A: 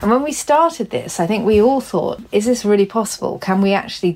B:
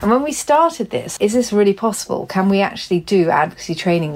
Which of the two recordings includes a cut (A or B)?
B